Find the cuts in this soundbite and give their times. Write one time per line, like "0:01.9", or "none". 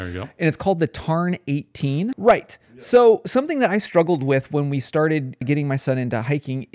0:02.1
0:05.4

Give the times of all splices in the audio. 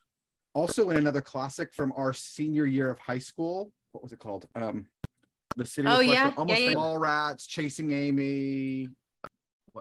0:03.9
0:05.5
0:06.7

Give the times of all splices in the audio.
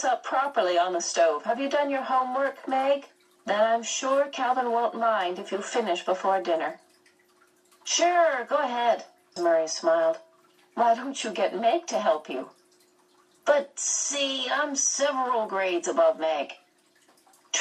0:03.4
0:09.4

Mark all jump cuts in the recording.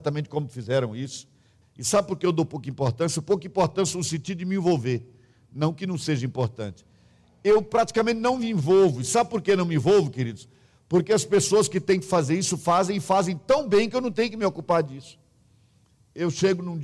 0:01.6

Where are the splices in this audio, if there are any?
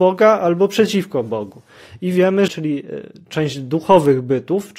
0:02.5

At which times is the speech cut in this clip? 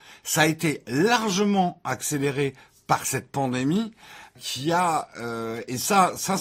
0:04.4

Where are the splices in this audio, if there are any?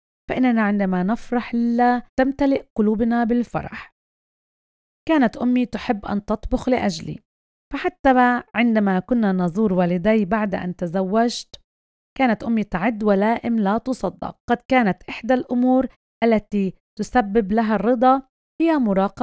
0:02.1
0:14.4

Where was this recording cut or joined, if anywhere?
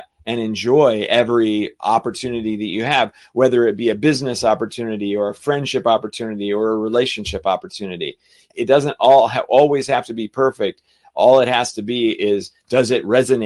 0:08.5

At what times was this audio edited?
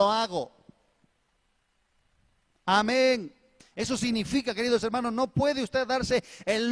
0:03.6

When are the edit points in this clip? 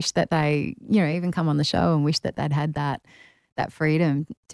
none

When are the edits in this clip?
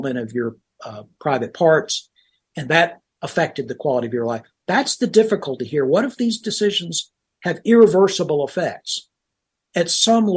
none

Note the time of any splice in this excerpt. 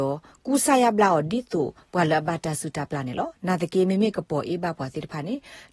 none

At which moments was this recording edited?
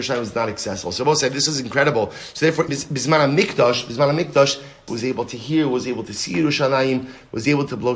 0:02.7
0:04.9

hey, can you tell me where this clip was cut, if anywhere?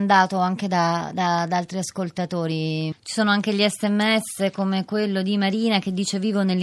0:02.9

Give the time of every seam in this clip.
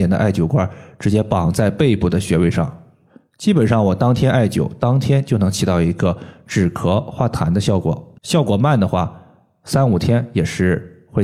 0:08.2

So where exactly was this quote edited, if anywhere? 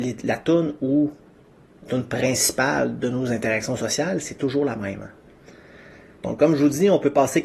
none

